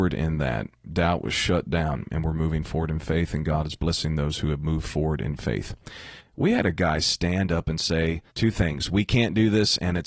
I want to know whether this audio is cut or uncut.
cut